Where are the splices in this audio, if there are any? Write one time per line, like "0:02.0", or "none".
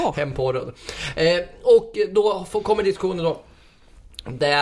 none